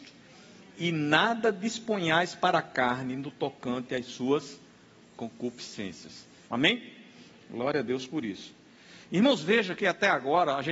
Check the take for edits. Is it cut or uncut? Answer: cut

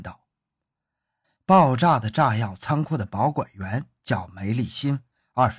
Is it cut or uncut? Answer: cut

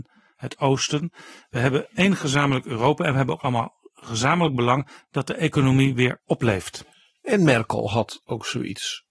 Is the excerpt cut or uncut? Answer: uncut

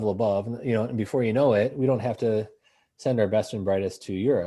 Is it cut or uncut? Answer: uncut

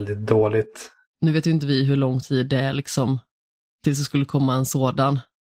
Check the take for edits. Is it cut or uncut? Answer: cut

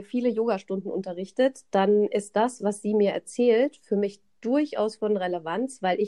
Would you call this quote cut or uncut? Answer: uncut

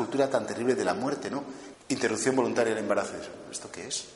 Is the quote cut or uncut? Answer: cut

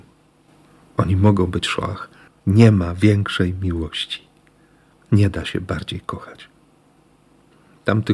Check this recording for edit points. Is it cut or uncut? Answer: cut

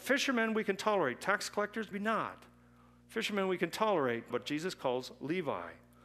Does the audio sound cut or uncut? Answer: cut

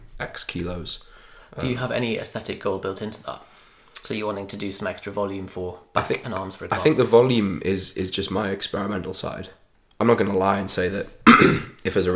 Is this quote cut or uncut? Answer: uncut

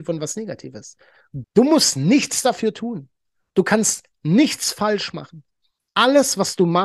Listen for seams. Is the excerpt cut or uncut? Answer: cut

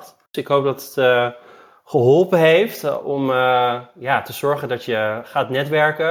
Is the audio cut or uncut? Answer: uncut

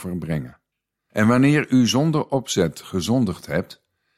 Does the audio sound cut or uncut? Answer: cut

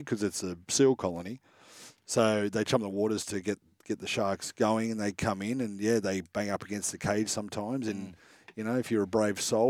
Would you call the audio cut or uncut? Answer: uncut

